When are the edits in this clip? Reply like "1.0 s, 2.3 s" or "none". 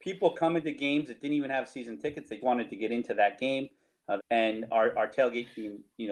2.4 s, 4.2 s